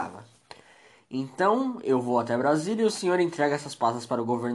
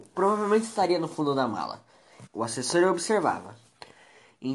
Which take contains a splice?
second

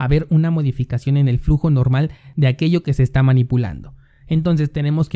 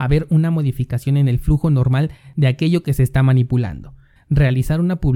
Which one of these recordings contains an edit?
second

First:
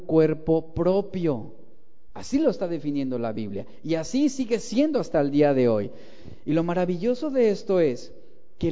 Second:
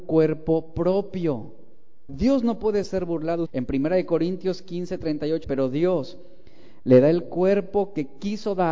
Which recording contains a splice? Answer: second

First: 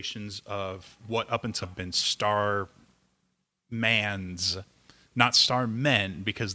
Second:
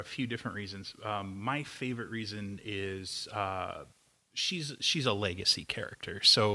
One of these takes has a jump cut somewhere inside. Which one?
first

